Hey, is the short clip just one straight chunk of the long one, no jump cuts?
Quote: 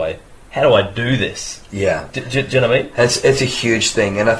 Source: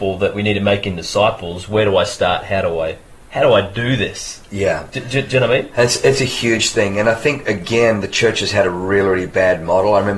yes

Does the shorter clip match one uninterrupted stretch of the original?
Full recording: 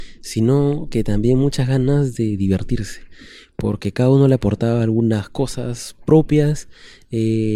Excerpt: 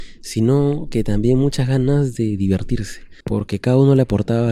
no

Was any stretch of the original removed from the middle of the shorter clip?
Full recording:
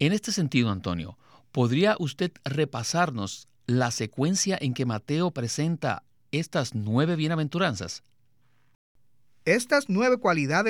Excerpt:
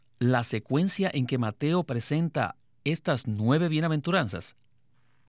no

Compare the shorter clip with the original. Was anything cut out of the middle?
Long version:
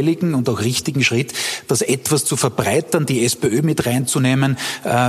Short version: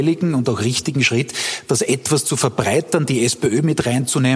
no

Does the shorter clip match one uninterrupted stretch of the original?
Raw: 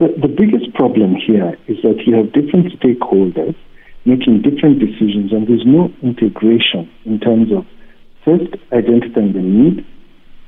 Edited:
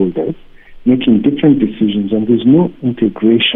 yes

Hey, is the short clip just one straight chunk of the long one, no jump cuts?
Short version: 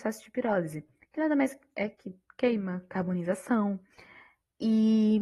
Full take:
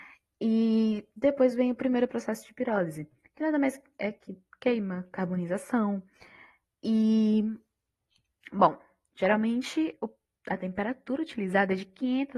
yes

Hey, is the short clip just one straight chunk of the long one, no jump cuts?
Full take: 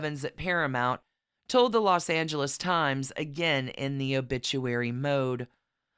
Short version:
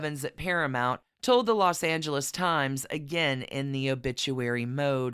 no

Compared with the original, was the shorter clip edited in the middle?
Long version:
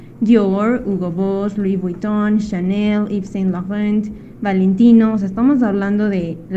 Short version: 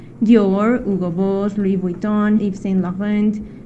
yes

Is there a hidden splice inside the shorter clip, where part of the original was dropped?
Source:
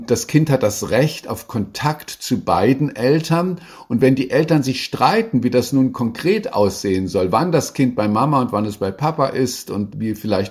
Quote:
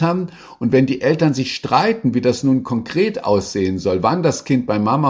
no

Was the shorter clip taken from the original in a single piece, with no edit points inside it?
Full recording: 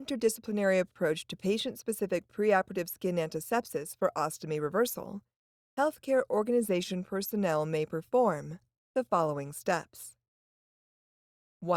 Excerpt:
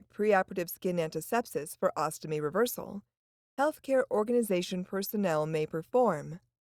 yes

